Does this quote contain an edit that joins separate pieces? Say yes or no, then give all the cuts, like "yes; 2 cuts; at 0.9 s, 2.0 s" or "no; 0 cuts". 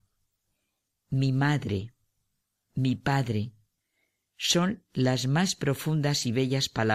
no; 0 cuts